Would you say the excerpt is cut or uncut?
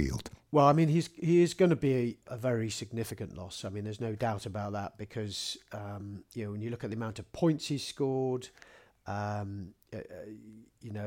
cut